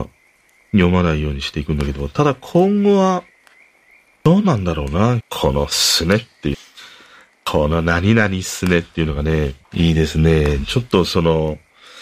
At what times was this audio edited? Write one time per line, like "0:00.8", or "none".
0:05.2
0:06.5
0:09.6